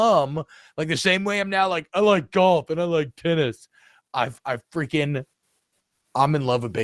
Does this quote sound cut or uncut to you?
uncut